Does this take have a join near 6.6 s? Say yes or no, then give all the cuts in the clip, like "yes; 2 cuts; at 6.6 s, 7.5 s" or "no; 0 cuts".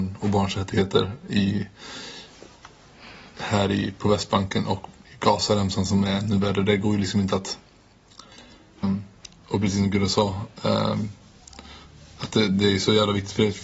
no; 1 cut; at 8.8 s